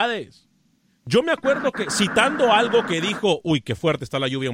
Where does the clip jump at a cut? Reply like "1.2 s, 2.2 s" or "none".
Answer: none

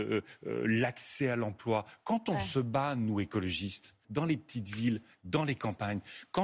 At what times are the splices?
4.0 s

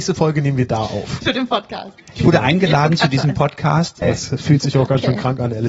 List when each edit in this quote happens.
1.2 s, 4.0 s

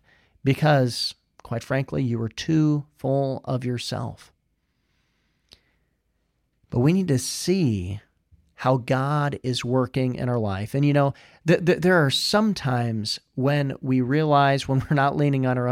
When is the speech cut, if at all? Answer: none

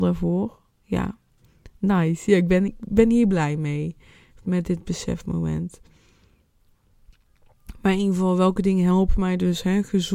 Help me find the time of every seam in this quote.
2.7 s

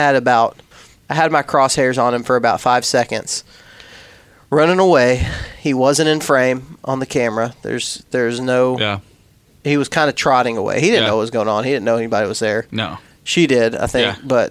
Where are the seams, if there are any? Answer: none

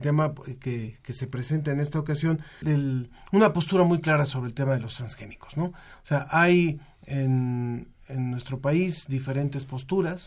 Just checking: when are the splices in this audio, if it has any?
2.6 s

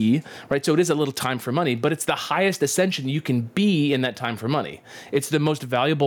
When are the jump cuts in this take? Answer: none

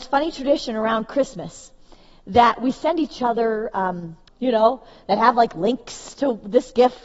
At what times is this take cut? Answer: 4.3 s

